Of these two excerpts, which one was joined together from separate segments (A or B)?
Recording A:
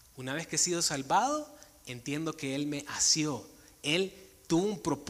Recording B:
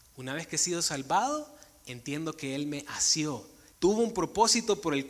B